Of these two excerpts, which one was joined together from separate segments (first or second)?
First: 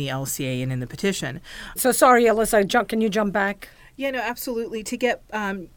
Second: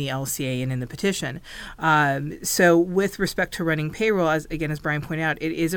first